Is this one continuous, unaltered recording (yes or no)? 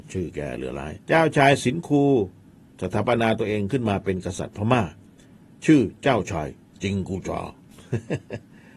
no